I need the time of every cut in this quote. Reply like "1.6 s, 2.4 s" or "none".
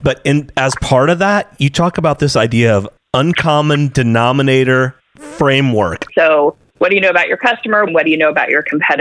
6.1 s, 7.9 s